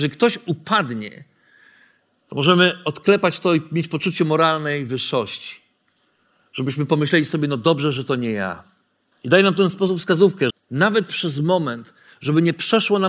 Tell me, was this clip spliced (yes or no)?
yes